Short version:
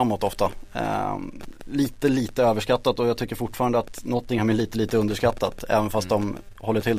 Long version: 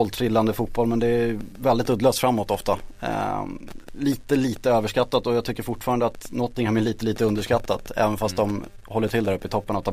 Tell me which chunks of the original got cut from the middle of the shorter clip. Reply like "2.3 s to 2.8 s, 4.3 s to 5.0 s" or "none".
none